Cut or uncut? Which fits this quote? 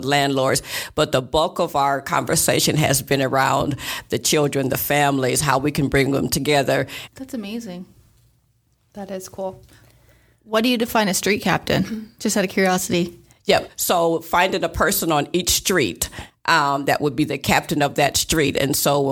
cut